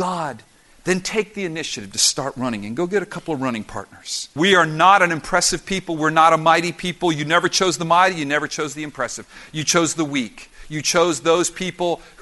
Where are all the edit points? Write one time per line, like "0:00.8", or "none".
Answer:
0:04.4